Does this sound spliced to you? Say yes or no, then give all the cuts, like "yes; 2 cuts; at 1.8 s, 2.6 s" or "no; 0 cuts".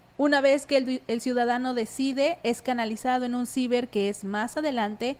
no; 0 cuts